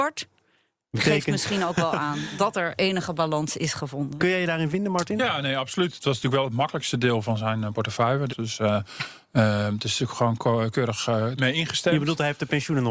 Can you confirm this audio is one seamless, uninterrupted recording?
no; 2 cuts; at 8.3 s, 11.4 s

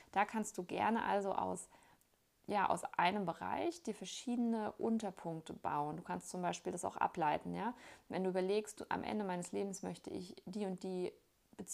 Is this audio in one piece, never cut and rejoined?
yes; 0 cuts

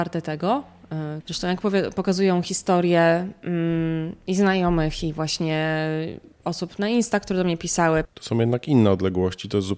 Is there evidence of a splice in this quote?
yes; 2 cuts; at 1.2 s, 8.0 s

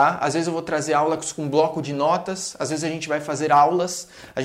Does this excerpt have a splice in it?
no; 0 cuts

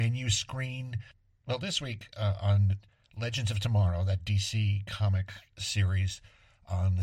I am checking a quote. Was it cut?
no; 0 cuts

